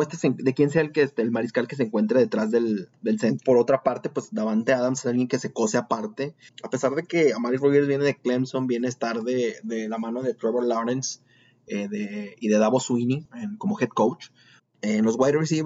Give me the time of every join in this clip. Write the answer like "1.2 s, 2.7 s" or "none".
6.5 s, 14.6 s